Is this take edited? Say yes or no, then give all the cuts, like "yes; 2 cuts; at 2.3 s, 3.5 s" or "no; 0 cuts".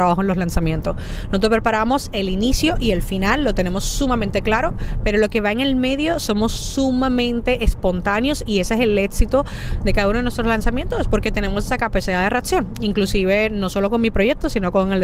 no; 0 cuts